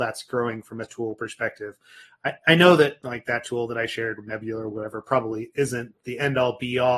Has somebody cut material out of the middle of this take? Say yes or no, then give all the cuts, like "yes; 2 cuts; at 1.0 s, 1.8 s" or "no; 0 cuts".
no; 0 cuts